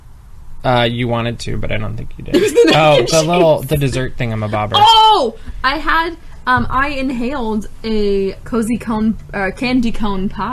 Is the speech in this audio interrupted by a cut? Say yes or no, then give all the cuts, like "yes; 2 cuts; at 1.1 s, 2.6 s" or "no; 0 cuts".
yes; 1 cut; at 8.4 s